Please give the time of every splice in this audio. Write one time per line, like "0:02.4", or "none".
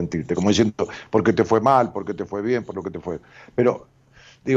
none